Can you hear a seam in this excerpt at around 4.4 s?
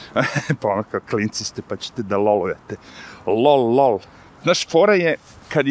yes; 1 cut; at 4.4 s

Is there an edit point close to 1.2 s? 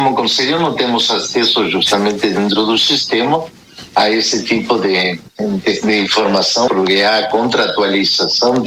no; 2 cuts; at 5.3 s, 6.7 s

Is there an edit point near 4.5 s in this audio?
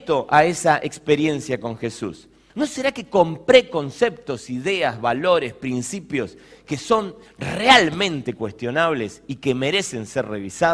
no; 1 cut; at 2.5 s

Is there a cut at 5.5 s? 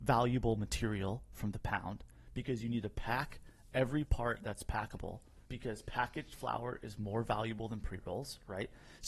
yes; 1 cut; at 5.5 s

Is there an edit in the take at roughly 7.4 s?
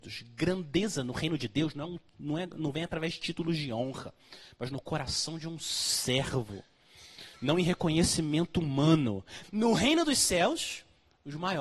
no; 1 cut; at 9.4 s

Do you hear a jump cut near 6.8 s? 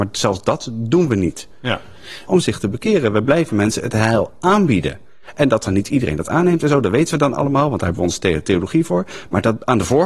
no; 1 cut; at 2.3 s

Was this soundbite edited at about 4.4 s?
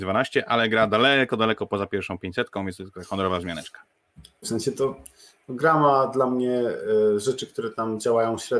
yes; 1 cut; at 4.4 s

